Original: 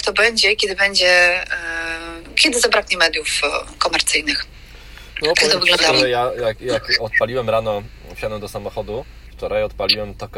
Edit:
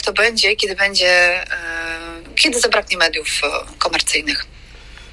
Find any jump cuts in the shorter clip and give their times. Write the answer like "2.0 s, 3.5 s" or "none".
none